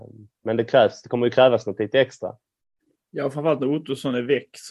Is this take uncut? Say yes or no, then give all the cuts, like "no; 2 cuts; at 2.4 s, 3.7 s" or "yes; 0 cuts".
yes; 0 cuts